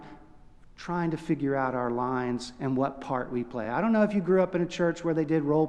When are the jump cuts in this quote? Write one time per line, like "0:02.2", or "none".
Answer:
none